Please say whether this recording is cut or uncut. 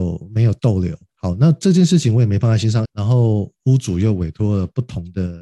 cut